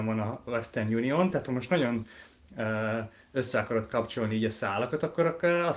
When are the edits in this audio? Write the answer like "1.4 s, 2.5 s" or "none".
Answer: none